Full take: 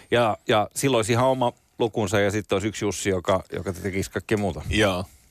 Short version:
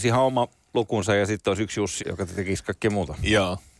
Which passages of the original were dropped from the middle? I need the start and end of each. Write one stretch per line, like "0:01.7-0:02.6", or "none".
0:03.0-0:03.5